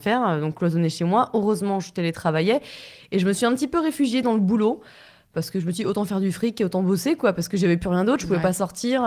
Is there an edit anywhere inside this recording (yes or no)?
no